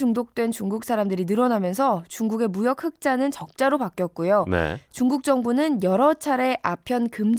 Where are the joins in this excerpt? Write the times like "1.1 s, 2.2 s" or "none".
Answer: none